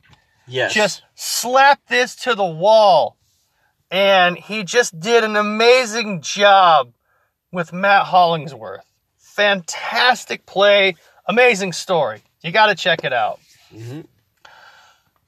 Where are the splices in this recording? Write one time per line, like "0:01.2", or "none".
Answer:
0:09.1